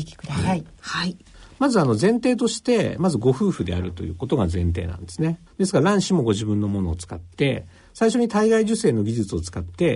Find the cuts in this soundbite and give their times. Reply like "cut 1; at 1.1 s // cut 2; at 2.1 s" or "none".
cut 1; at 5.5 s